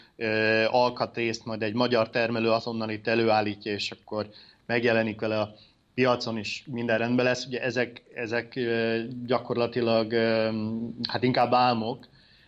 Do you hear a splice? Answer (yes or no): no